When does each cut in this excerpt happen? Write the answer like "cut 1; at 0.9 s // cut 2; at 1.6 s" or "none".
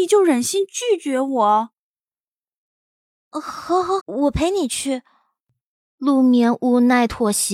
cut 1; at 4.0 s

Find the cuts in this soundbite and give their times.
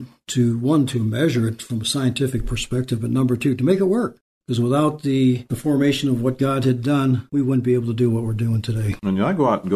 none

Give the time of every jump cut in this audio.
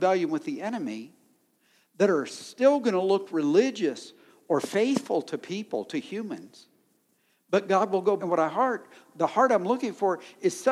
cut 1; at 8.2 s

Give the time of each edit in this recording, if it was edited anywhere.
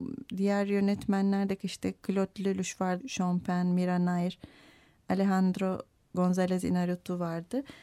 cut 1; at 3.0 s

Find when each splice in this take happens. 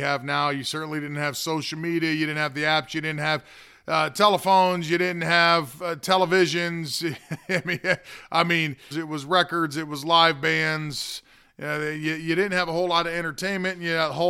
cut 1; at 8.9 s

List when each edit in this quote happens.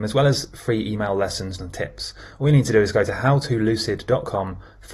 cut 1; at 1.6 s

